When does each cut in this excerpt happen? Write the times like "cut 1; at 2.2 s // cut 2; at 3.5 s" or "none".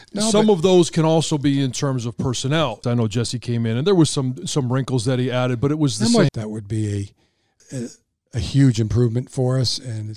cut 1; at 2.8 s // cut 2; at 6.3 s // cut 3; at 7.6 s